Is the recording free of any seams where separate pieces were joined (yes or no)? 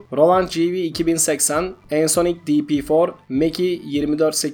yes